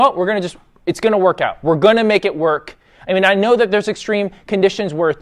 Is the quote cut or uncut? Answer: uncut